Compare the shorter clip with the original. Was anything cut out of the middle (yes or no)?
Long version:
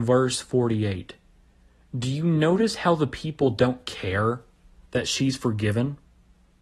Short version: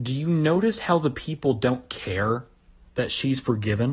no